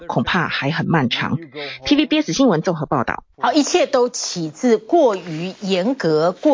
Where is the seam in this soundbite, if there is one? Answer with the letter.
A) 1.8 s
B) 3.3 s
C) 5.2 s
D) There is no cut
B